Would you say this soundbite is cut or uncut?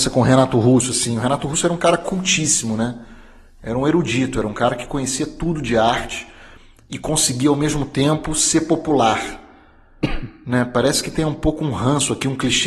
uncut